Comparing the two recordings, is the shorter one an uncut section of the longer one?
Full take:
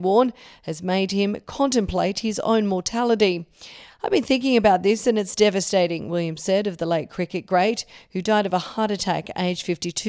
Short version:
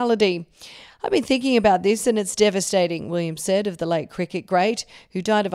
yes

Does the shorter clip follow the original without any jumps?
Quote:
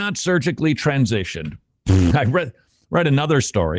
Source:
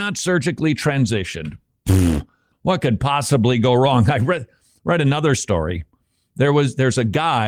no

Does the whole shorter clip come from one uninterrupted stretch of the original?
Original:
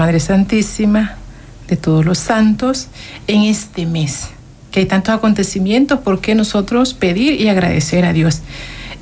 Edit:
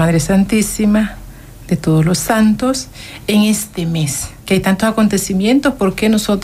no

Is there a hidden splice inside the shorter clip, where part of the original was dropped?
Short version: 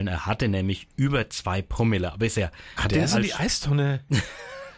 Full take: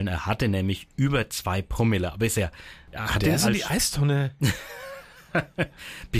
yes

